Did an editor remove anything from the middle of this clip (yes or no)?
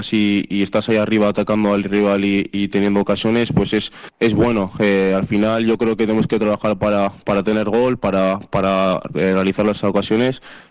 no